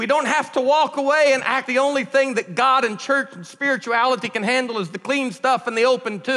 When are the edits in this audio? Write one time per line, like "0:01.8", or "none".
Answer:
0:01.7

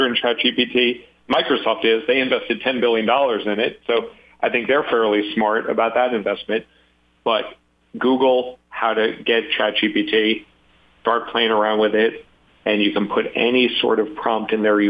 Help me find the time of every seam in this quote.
none

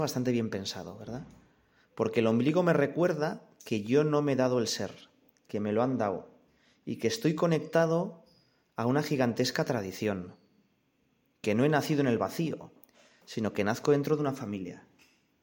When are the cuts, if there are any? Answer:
none

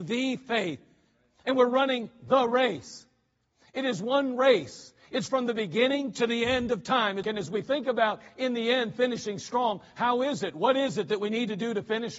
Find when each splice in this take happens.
0:07.2

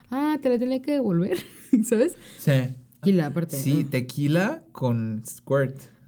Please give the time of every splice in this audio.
0:03.0

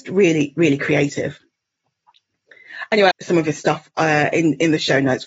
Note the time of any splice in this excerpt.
0:03.1

